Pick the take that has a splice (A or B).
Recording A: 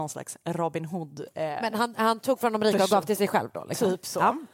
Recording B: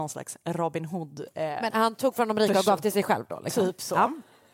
B